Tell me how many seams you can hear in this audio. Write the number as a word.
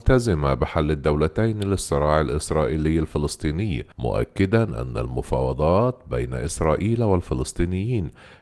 one